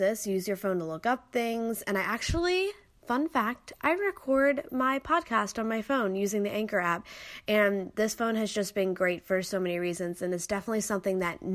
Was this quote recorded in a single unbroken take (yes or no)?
yes